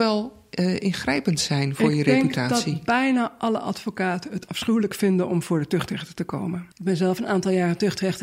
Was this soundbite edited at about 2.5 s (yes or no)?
no